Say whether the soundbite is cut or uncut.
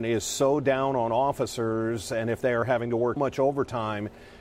cut